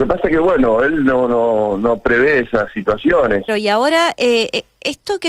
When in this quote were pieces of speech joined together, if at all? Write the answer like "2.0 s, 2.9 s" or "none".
3.5 s